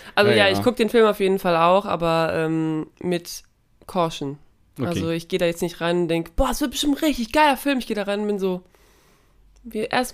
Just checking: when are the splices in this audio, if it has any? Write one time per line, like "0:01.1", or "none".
none